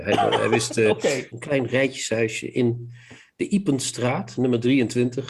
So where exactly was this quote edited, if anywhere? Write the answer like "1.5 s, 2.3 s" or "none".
1.3 s